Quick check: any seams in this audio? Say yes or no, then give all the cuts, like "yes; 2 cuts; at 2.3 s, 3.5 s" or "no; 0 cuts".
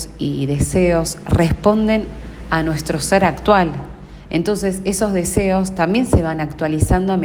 no; 0 cuts